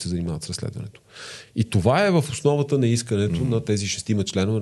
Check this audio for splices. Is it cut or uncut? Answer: uncut